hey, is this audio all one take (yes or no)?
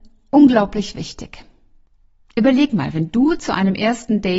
yes